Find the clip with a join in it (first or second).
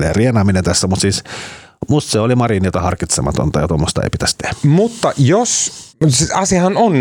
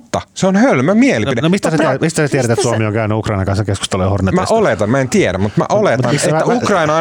first